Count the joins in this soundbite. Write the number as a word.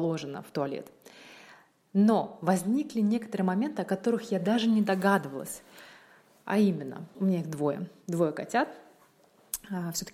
one